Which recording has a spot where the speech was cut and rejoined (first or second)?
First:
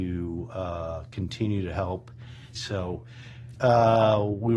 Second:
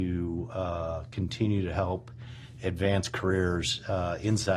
first